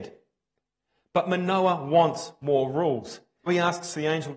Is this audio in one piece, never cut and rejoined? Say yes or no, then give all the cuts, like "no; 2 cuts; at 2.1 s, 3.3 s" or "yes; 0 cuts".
no; 1 cut; at 3.5 s